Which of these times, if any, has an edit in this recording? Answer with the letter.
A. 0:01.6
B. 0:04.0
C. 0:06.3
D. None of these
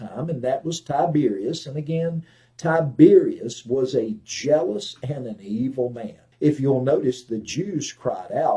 C